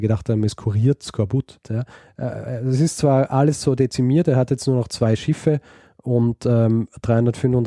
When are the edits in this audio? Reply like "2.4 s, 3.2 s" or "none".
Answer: 1.6 s